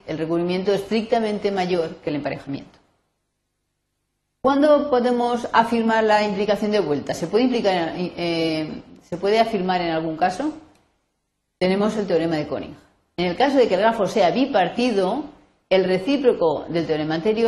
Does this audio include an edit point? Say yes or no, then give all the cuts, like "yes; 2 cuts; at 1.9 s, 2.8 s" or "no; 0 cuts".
no; 0 cuts